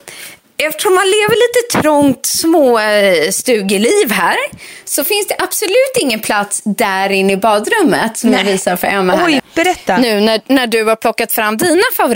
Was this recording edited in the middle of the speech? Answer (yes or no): yes